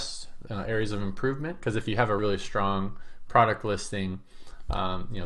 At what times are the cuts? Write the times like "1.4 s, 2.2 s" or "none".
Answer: 2.2 s